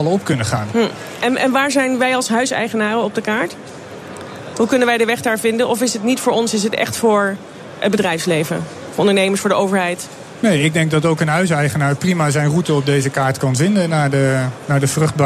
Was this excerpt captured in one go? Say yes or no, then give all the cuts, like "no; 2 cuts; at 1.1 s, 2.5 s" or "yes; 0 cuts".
yes; 0 cuts